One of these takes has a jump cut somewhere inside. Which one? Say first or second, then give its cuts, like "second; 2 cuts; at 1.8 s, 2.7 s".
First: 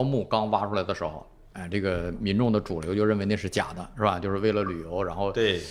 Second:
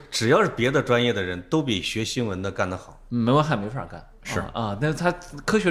second; 1 cut; at 3.1 s